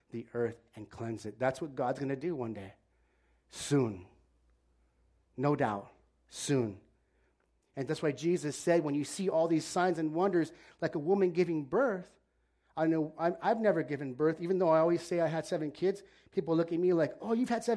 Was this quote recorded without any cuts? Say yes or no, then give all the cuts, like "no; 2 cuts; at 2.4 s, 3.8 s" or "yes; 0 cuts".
yes; 0 cuts